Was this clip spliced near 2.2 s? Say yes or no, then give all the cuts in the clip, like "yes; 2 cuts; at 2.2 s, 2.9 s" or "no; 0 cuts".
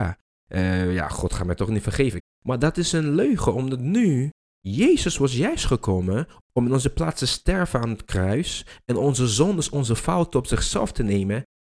yes; 1 cut; at 2.2 s